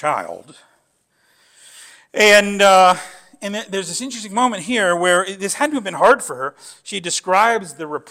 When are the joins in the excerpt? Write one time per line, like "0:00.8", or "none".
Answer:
none

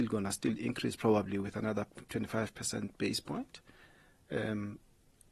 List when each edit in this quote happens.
none

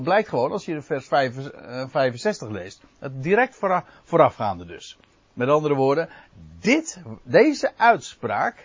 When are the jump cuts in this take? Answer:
0:05.1

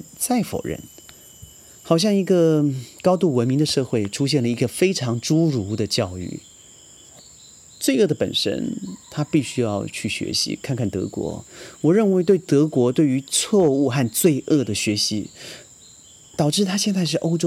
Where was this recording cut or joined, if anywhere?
none

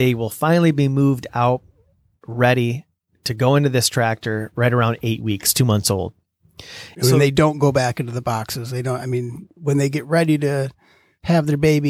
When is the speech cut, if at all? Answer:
0:06.9

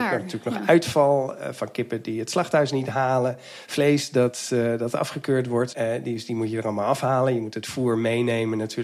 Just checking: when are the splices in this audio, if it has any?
0:05.7

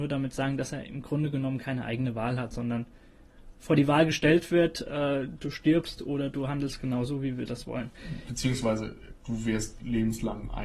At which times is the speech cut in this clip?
none

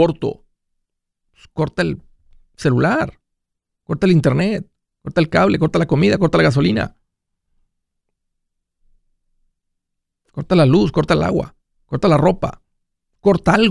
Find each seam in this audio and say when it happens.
none

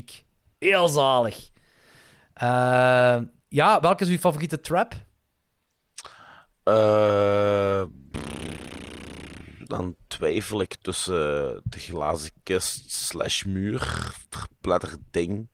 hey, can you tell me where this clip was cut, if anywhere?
none

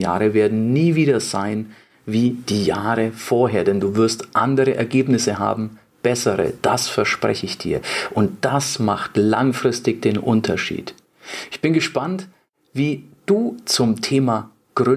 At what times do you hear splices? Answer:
none

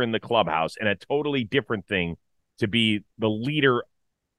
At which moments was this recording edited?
0:03.1

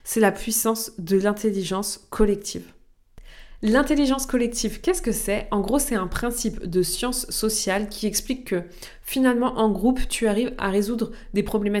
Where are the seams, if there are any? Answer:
none

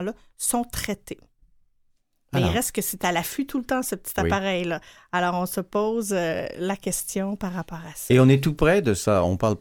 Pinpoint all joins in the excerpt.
none

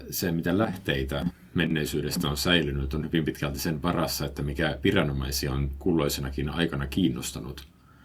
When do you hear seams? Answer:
none

